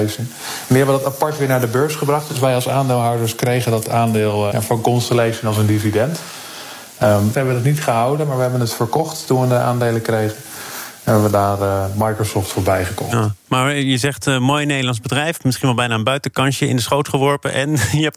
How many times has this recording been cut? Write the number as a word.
two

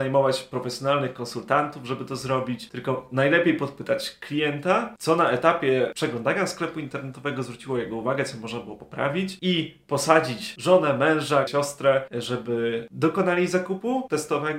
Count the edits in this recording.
one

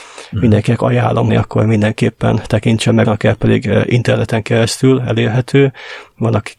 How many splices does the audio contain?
two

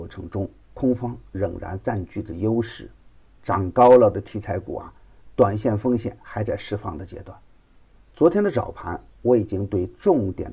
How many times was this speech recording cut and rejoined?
one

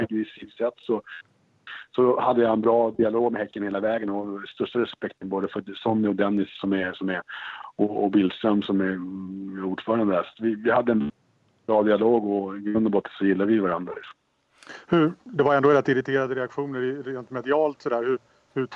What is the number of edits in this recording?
zero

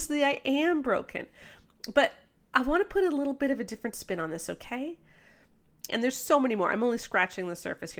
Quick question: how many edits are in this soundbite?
one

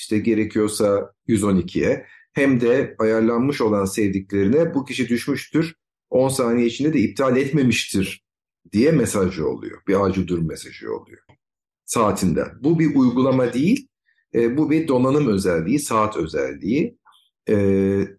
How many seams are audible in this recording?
one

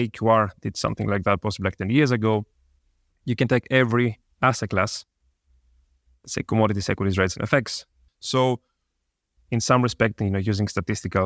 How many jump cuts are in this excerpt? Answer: two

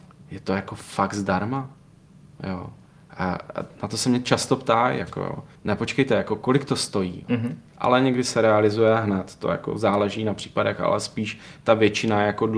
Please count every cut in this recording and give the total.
two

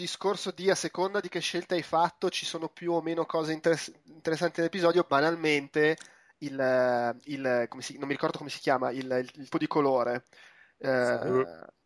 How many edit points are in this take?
one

